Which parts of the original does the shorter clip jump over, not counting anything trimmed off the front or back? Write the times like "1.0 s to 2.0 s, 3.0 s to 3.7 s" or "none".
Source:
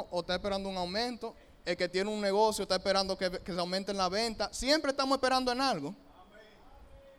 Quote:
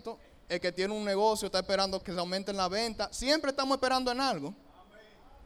3.2 s to 3.4 s